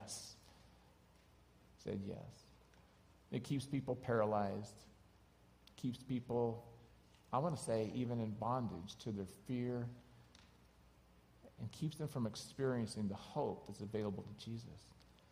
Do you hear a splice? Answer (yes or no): yes